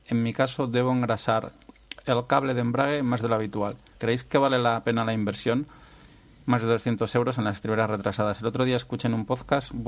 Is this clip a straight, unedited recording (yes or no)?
no